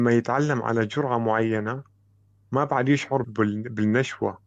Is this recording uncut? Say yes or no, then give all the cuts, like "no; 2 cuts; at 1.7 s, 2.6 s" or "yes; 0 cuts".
no; 1 cut; at 3.2 s